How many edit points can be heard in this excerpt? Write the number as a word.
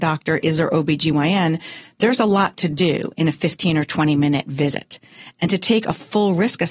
zero